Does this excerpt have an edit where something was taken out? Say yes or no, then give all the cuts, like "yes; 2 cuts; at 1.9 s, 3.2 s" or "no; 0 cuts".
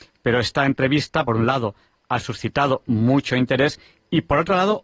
no; 0 cuts